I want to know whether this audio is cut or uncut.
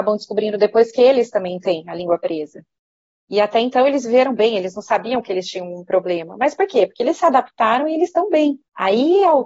uncut